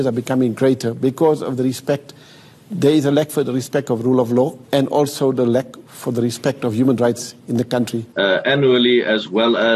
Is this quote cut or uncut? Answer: cut